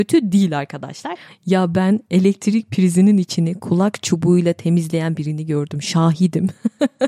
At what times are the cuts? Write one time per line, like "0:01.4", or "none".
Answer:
0:01.3